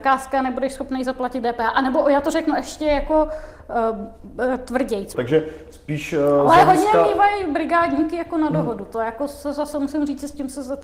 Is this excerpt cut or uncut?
cut